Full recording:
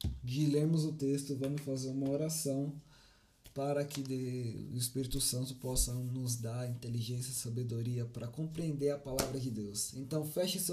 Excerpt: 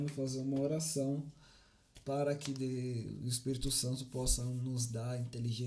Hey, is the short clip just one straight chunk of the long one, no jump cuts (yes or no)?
yes